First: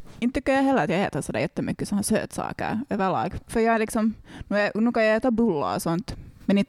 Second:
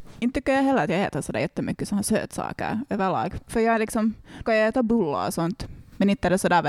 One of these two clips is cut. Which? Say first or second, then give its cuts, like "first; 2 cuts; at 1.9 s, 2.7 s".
second; 1 cut; at 4.4 s